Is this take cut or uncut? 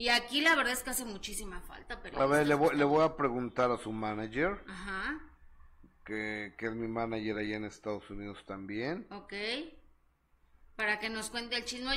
uncut